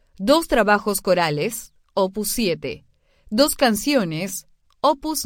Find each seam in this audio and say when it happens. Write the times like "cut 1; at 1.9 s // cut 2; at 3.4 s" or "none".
none